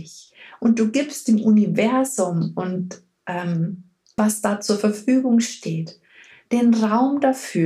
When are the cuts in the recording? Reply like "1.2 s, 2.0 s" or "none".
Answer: 4.2 s

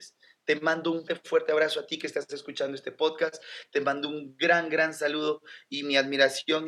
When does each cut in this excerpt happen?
1.1 s

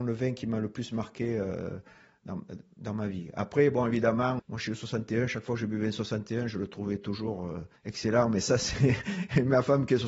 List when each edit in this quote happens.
4.4 s, 7.8 s

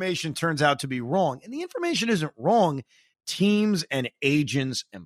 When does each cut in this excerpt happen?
3.1 s

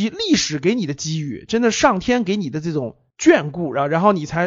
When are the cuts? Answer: none

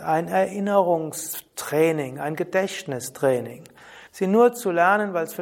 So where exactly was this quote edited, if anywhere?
4.1 s

